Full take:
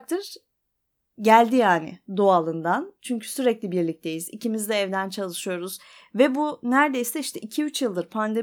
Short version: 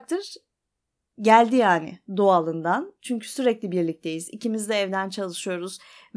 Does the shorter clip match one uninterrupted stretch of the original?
yes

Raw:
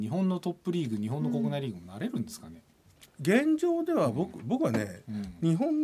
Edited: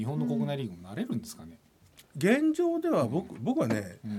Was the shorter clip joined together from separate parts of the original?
no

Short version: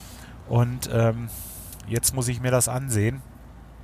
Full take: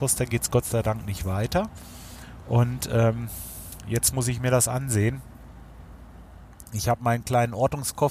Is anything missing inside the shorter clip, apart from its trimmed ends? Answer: no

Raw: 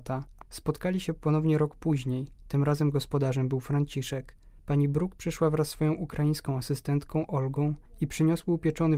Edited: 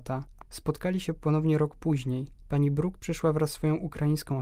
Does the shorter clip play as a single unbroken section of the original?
no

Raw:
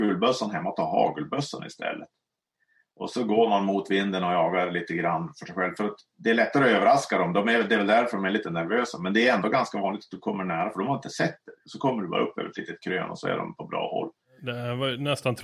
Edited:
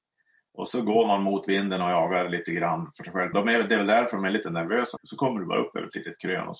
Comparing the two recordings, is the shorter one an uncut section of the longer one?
no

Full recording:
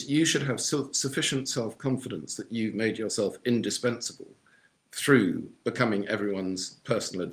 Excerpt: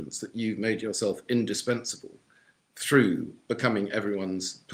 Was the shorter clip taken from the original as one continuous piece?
yes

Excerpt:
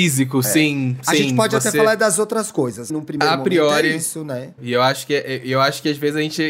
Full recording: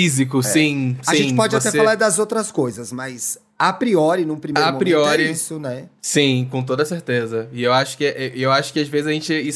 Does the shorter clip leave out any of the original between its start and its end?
yes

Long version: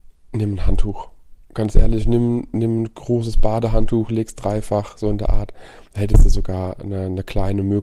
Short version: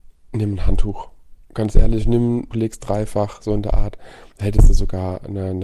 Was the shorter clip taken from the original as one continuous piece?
no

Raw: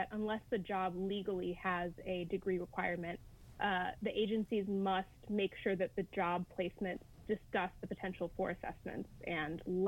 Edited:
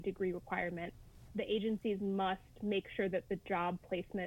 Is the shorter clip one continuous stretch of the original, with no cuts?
no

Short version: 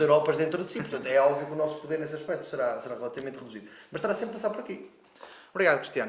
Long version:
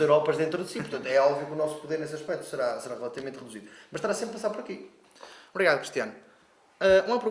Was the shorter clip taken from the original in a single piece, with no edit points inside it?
yes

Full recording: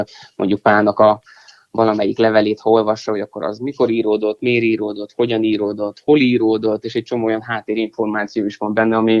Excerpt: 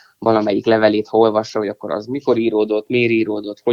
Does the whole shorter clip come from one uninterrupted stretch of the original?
yes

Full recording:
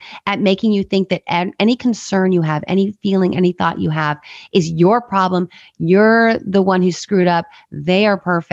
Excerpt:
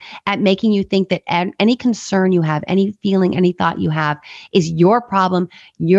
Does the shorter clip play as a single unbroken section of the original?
yes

